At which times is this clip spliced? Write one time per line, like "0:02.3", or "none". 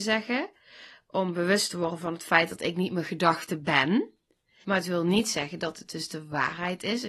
0:04.6